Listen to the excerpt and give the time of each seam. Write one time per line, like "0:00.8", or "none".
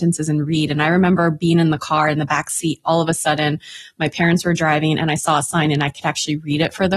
none